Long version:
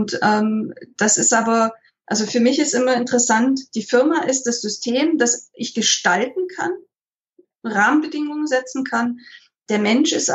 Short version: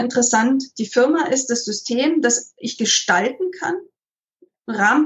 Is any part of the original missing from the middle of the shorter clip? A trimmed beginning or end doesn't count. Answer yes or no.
no